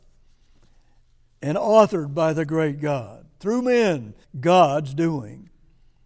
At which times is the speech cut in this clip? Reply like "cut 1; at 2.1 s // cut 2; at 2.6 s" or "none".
cut 1; at 4.2 s

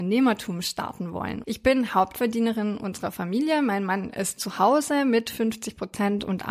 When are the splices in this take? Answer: cut 1; at 1.4 s

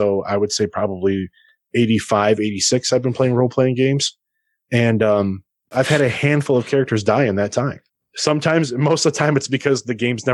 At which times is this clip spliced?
none

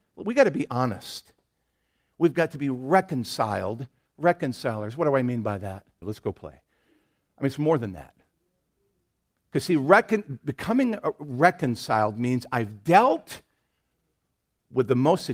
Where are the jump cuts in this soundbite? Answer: cut 1; at 6.0 s

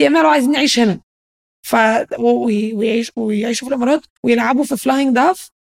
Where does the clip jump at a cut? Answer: cut 1; at 2.4 s // cut 2; at 4.1 s

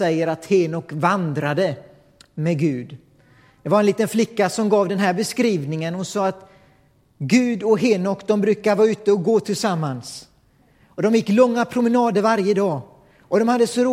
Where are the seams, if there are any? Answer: none

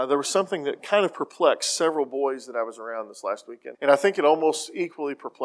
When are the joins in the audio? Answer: cut 1; at 3.7 s

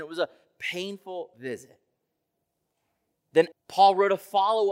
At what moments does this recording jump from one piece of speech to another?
cut 1; at 3.5 s

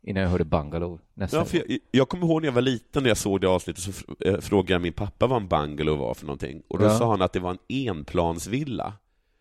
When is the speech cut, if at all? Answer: none

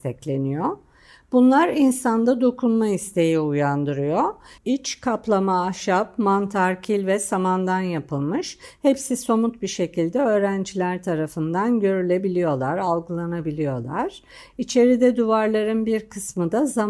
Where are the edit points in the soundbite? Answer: cut 1; at 4.6 s

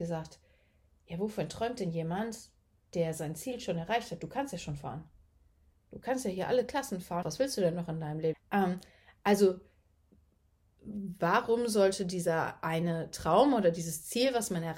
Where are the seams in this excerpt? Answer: cut 1; at 7.2 s // cut 2; at 8.3 s

